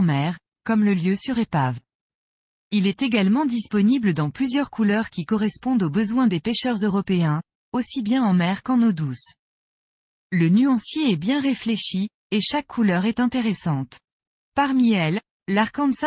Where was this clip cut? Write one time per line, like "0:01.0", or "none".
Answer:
none